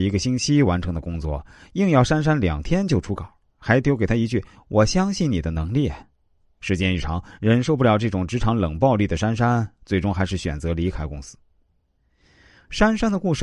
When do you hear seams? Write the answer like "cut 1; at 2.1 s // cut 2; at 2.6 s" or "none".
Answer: none